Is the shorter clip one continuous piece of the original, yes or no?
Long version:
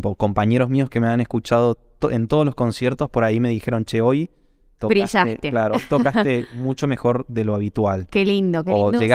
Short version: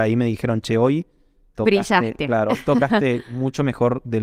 yes